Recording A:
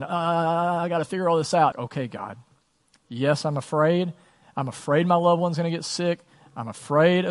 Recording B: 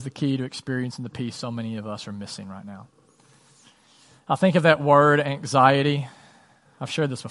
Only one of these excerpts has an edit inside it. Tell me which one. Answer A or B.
A